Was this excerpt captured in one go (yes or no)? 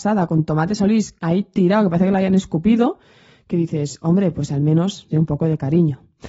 no